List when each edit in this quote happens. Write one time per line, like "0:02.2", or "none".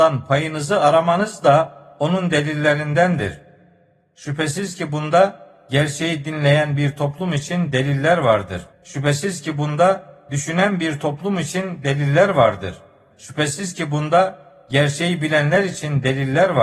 0:08.7
0:13.1